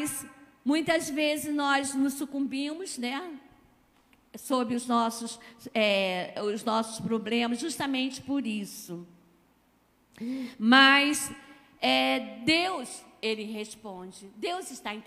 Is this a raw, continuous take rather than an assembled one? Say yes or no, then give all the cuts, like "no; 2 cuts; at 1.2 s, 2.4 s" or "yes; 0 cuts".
yes; 0 cuts